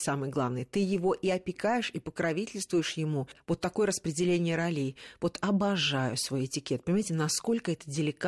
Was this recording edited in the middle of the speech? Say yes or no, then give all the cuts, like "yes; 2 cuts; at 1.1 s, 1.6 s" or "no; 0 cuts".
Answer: no; 0 cuts